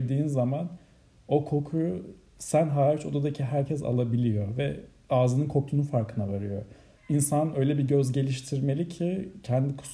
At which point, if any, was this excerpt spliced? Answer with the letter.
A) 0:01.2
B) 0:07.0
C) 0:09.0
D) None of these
B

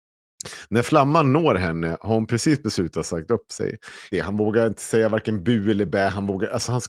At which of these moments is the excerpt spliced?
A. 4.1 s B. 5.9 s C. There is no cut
A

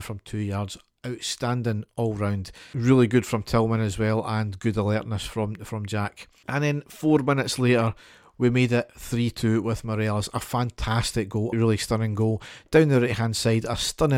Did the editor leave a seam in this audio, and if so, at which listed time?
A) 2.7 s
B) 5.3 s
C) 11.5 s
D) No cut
C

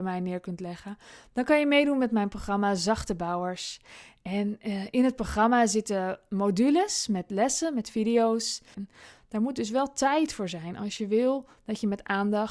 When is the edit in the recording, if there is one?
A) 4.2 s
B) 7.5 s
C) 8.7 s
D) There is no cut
C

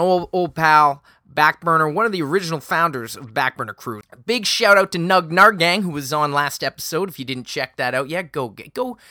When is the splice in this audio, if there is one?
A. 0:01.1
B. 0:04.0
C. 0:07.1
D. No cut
B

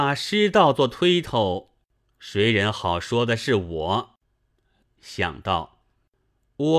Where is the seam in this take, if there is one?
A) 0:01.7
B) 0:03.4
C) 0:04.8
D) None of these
C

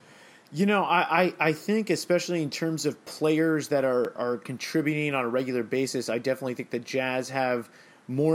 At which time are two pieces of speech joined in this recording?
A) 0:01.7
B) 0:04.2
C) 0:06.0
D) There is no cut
B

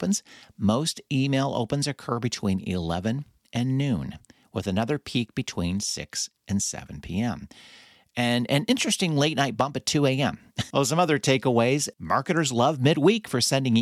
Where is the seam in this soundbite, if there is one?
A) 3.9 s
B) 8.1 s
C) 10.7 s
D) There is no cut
C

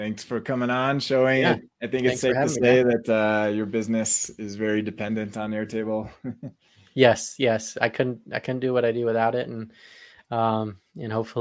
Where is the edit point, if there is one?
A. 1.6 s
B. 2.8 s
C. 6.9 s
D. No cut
D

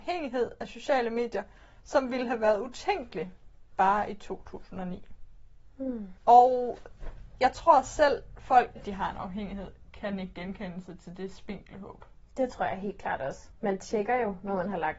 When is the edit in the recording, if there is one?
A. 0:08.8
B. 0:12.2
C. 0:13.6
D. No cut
A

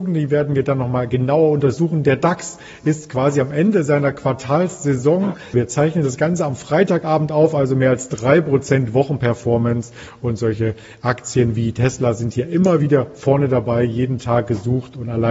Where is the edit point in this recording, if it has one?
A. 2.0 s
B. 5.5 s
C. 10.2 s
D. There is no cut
B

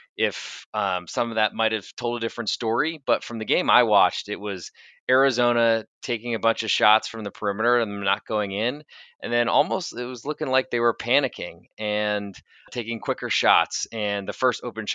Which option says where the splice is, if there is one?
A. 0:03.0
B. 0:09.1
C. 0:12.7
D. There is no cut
C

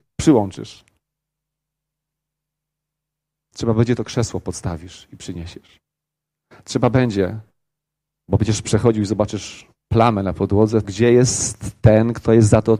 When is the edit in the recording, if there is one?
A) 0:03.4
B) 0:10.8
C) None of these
B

